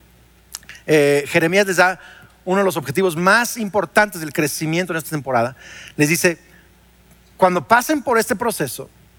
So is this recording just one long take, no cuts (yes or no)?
yes